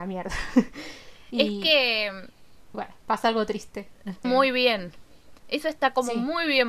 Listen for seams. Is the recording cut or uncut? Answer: cut